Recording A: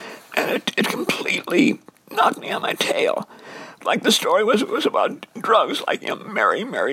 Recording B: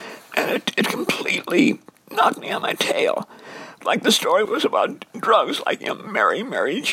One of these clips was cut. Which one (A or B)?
B